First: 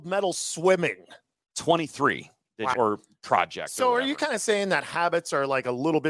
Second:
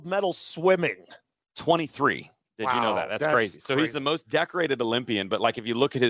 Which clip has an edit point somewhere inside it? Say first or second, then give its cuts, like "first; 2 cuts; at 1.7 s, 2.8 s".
first; 1 cut; at 2.7 s